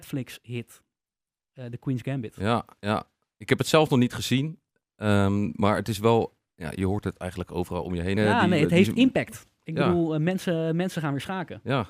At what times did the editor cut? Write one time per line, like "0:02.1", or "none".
0:08.2